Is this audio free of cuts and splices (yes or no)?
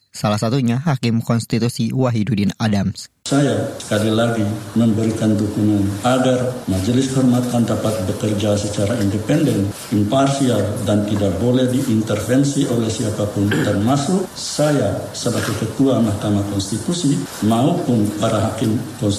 yes